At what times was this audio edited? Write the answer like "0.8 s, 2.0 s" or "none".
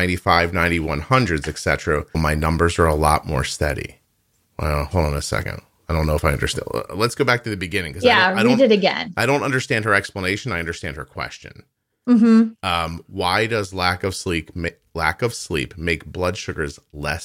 2.1 s